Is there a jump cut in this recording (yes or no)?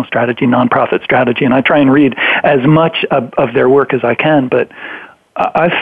no